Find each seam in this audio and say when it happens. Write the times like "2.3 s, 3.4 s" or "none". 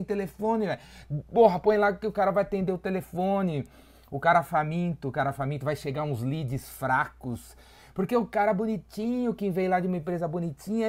none

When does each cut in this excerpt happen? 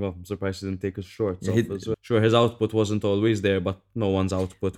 1.9 s

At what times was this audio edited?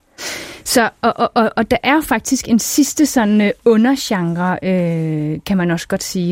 none

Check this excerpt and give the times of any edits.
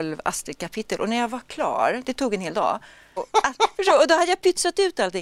3.2 s

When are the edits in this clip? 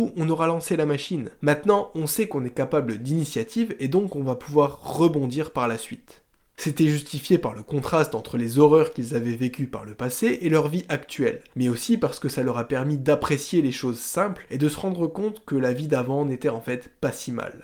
6.5 s

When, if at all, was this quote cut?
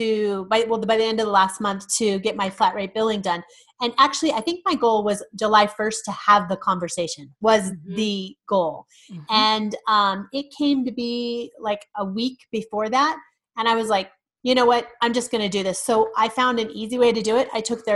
none

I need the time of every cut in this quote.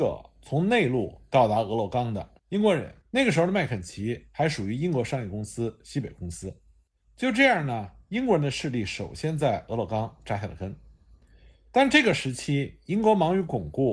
3.0 s

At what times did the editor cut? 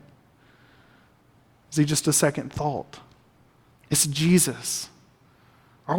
3.7 s

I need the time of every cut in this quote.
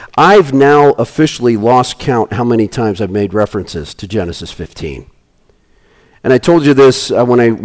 none

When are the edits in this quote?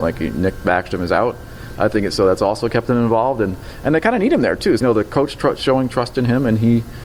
1.7 s, 4.8 s

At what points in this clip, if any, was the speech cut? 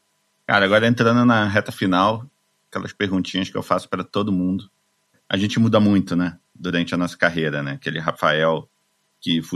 none

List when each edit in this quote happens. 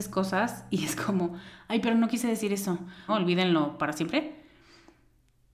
3.1 s

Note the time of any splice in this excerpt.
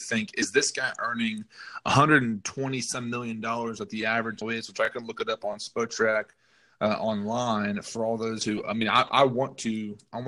4.4 s

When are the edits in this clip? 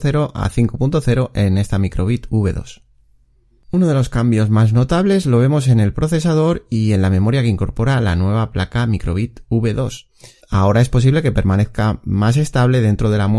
10.4 s

